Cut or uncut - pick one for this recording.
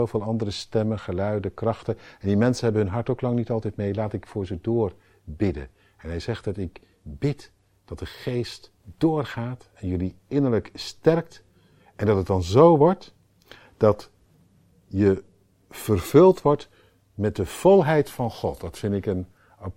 uncut